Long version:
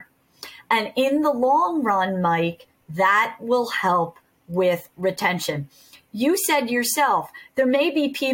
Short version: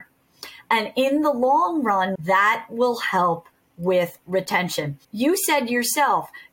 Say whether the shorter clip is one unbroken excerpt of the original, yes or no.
no